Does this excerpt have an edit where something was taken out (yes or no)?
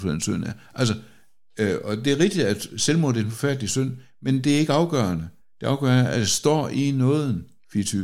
no